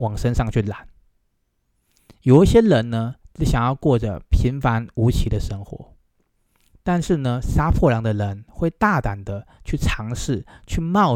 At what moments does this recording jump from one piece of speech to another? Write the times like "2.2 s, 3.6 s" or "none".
none